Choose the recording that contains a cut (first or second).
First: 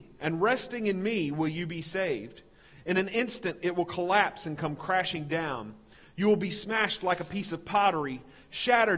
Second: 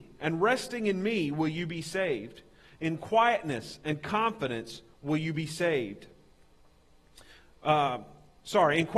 first